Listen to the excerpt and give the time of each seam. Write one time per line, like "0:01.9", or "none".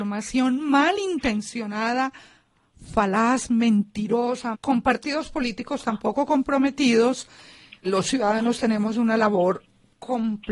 0:04.5
0:07.8